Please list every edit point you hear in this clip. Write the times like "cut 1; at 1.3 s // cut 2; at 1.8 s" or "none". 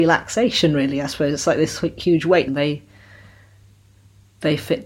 cut 1; at 2.5 s

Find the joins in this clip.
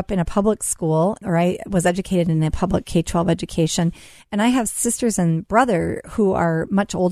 cut 1; at 1.2 s

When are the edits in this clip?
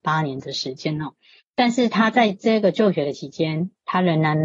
cut 1; at 1.4 s

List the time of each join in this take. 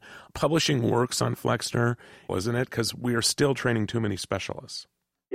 cut 1; at 2.3 s

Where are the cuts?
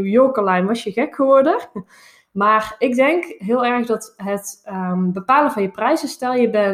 none

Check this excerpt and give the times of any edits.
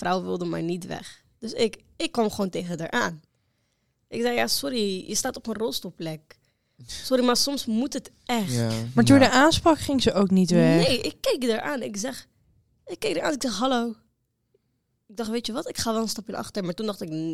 none

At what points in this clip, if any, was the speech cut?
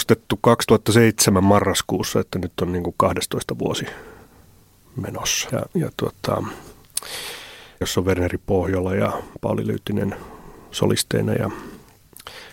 cut 1; at 5.5 s // cut 2; at 7.8 s

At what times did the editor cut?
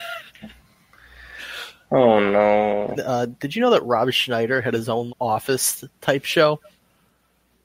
cut 1; at 3.0 s // cut 2; at 5.1 s

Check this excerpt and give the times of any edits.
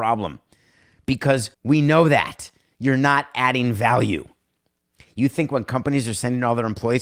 cut 1; at 1.5 s

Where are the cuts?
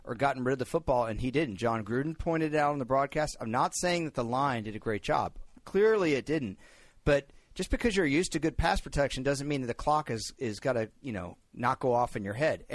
none

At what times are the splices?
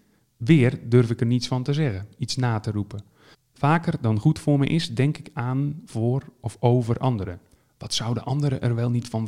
cut 1; at 3.3 s

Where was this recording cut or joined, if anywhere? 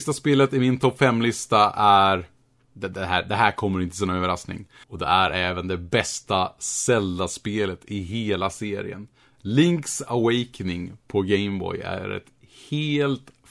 cut 1; at 4.8 s

